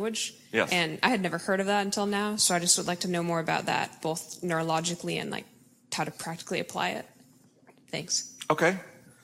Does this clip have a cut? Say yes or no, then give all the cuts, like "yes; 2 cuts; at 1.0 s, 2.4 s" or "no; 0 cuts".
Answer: no; 0 cuts